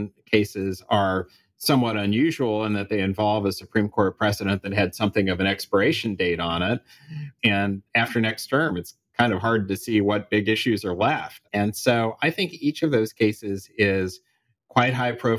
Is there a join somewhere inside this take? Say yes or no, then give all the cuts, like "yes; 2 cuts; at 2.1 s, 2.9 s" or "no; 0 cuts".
yes; 2 cuts; at 7.4 s, 11.5 s